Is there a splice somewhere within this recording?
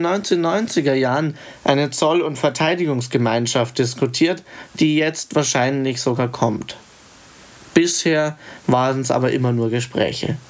no; 0 cuts

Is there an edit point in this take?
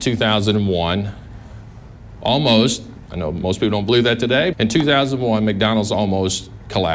yes; 1 cut; at 4.5 s

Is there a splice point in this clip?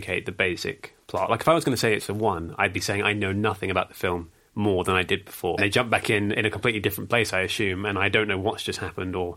yes; 1 cut; at 5.6 s

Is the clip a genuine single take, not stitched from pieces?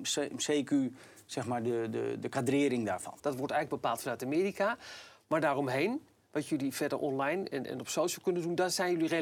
no; 1 cut; at 3.2 s

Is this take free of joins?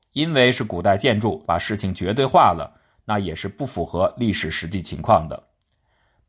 no; 1 cut; at 1.5 s

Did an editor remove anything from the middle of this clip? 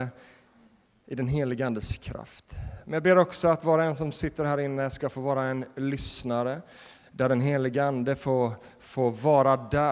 no; 0 cuts

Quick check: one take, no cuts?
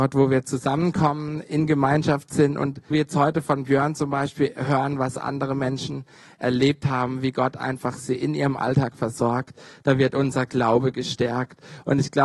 no; 1 cut; at 2.9 s

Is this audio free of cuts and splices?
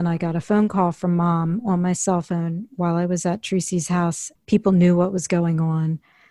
no; 1 cut; at 4.3 s

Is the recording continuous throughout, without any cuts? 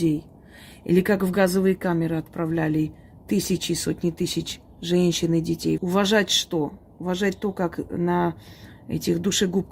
no; 1 cut; at 5.8 s

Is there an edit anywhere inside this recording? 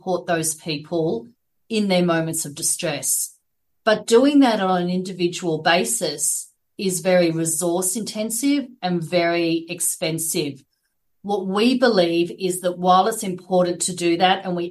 no; 0 cuts

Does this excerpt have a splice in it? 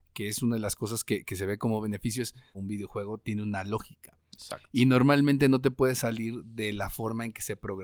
yes; 1 cut; at 2.5 s

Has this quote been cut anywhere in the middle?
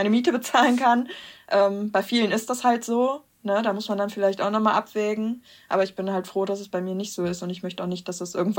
no; 0 cuts

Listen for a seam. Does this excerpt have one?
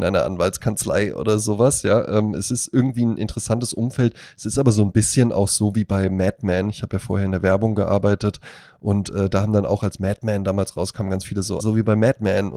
yes; 1 cut; at 11.6 s

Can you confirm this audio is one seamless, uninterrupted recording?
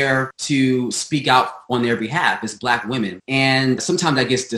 yes; 0 cuts

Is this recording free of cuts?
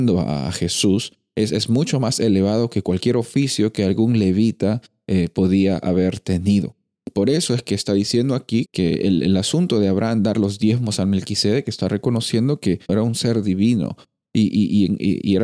no; 2 cuts; at 8.7 s, 12.9 s

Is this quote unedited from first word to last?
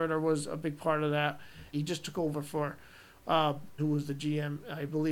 no; 2 cuts; at 1.7 s, 3.8 s

